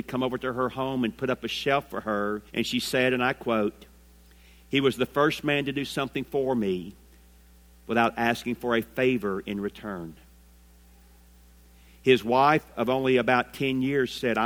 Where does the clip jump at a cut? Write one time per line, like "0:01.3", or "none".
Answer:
0:02.5